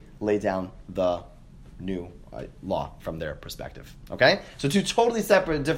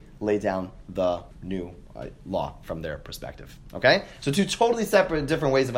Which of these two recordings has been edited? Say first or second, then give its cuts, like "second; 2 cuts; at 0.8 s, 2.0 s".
second; 1 cut; at 1.3 s